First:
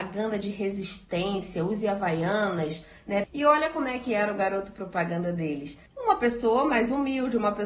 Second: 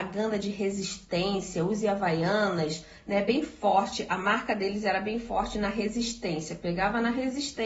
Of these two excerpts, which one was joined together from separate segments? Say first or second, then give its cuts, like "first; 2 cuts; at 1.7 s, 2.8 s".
first; 2 cuts; at 3.2 s, 5.9 s